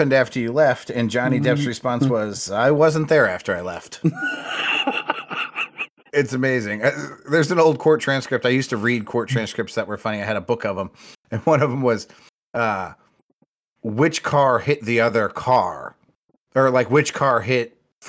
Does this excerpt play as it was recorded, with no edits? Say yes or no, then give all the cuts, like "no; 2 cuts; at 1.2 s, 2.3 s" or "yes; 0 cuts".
yes; 0 cuts